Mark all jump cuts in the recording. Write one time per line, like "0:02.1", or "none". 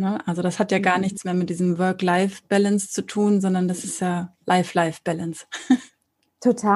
0:04.4